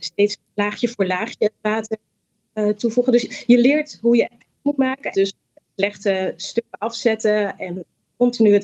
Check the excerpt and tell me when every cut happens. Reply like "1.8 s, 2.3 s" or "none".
5.1 s